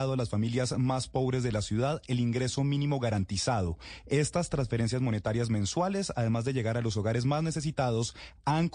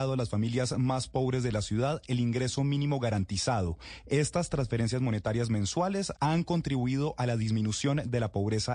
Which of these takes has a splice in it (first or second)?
second